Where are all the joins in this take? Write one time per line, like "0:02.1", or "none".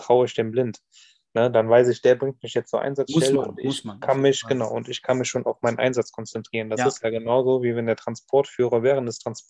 none

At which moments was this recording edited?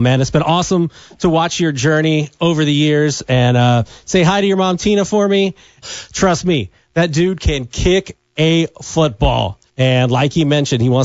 0:05.8
0:09.7

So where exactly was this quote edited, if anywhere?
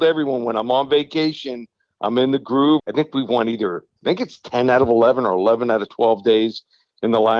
0:02.8

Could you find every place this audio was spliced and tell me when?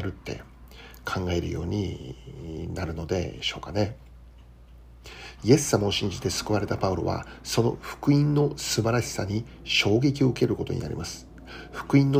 0:05.4

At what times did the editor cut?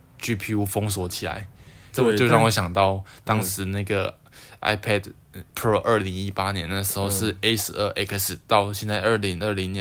0:01.9
0:05.5

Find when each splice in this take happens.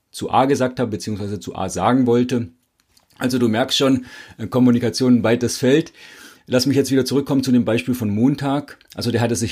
none

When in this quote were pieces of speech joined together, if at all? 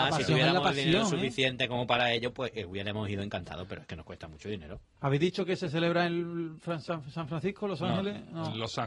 0:05.0

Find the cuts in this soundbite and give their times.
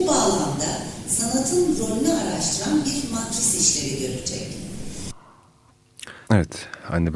0:06.2

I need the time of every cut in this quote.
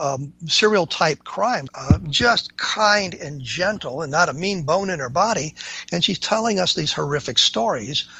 0:01.7

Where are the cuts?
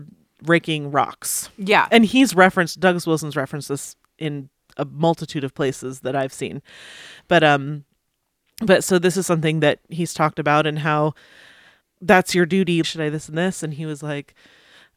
0:11.8
0:12.8

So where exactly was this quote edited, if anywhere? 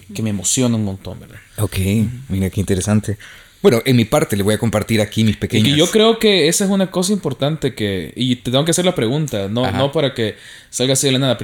none

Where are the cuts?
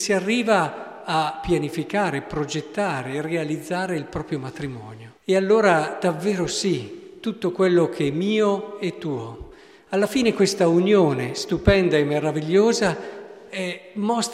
0:05.2

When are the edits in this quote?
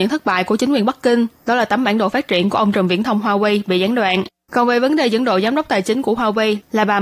0:04.4

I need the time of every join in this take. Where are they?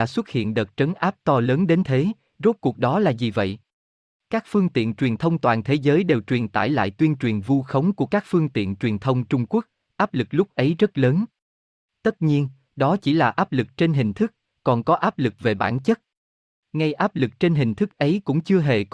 none

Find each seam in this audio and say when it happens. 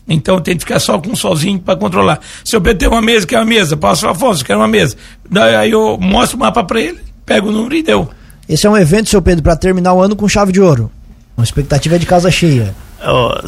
0:11.4

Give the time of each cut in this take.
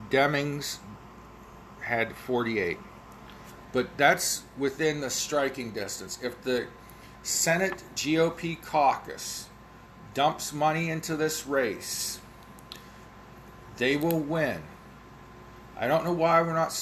none

